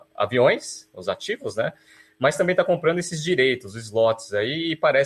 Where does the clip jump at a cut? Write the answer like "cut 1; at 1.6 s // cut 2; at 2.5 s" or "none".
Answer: none